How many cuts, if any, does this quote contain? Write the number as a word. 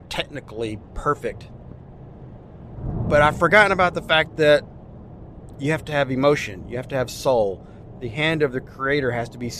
zero